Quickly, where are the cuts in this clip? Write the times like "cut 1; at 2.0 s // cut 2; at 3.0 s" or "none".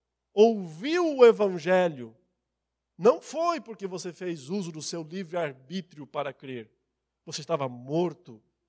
cut 1; at 2.9 s